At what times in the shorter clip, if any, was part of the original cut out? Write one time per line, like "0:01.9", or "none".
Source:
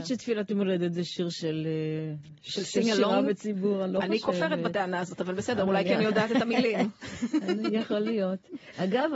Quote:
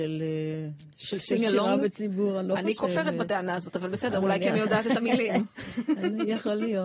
none